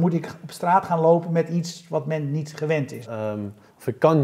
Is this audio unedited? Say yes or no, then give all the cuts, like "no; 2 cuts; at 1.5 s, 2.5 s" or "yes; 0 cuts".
no; 1 cut; at 3.0 s